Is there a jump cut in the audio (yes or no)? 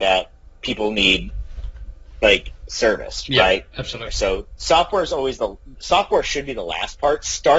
yes